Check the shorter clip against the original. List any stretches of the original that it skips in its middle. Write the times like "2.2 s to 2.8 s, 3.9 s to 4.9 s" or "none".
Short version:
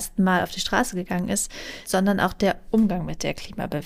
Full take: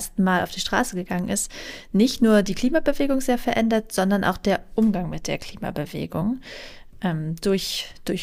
1.8 s to 3.9 s